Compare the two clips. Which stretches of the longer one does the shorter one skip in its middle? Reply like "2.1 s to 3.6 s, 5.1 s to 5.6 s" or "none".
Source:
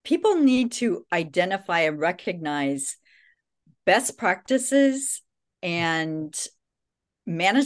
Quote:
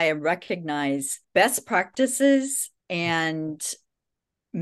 3.0 s to 3.8 s, 5.3 s to 5.5 s